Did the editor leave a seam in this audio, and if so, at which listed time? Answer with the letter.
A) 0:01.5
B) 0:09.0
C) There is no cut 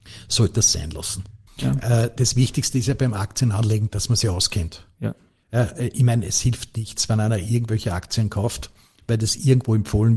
A